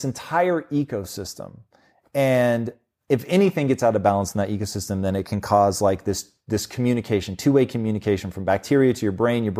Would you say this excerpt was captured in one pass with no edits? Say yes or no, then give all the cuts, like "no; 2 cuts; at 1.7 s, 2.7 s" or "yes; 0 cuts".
yes; 0 cuts